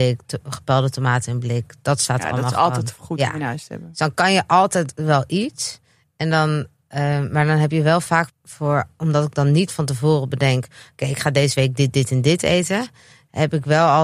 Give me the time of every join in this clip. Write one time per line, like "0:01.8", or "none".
0:08.3